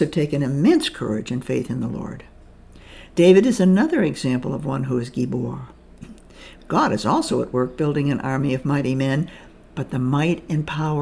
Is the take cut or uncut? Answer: cut